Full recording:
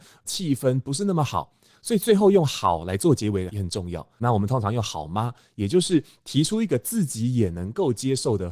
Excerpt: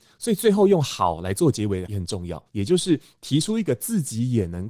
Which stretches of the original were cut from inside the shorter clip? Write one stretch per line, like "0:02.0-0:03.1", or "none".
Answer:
0:04.1-0:05.5